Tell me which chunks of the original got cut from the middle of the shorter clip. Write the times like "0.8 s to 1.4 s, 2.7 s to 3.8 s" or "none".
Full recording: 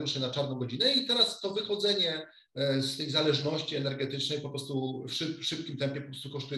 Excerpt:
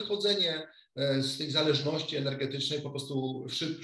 none